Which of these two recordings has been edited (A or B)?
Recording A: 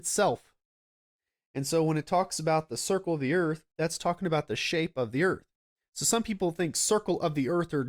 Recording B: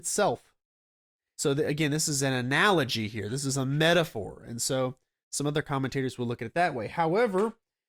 B